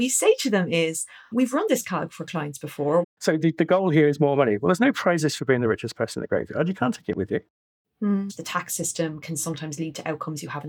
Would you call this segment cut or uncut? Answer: cut